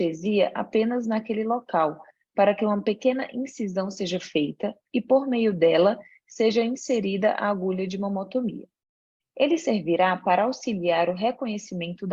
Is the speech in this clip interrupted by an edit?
yes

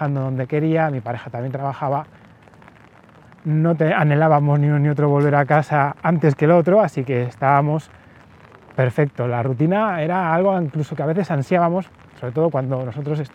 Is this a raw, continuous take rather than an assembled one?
yes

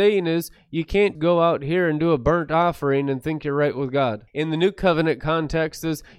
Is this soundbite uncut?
no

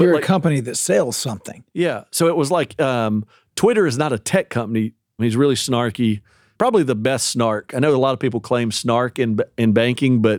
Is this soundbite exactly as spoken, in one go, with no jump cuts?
no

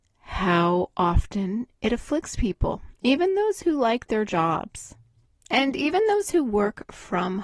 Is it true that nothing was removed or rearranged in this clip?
yes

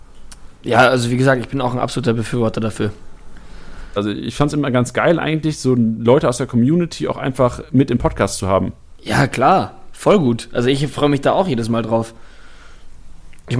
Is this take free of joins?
no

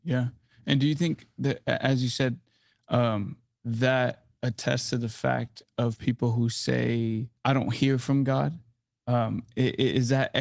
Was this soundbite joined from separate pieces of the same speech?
yes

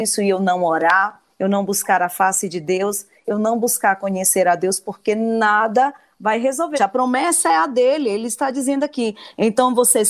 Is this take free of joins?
no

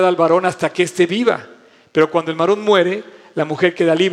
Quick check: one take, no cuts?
yes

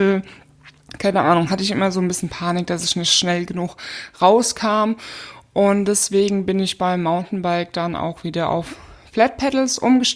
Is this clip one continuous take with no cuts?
yes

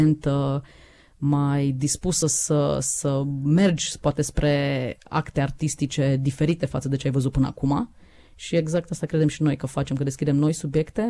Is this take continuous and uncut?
yes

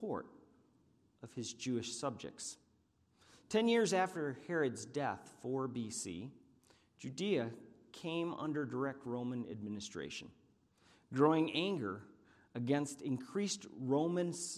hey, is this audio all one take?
yes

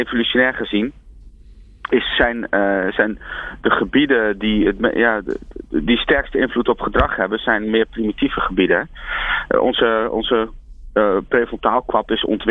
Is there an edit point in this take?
no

